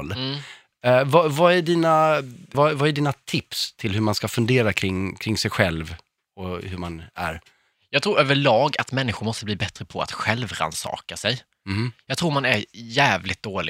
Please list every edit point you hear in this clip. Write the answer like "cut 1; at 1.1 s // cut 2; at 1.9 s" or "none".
cut 1; at 2.5 s